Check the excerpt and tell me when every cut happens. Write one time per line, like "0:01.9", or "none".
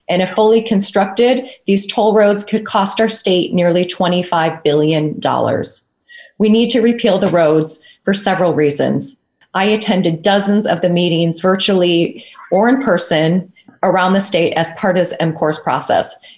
0:09.4